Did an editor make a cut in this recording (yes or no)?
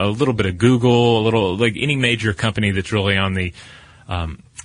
no